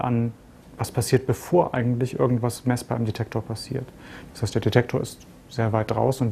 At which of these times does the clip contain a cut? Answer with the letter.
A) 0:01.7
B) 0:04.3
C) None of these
C